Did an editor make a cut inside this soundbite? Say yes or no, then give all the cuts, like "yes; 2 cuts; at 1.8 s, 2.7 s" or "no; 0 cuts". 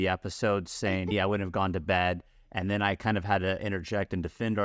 yes; 1 cut; at 1.1 s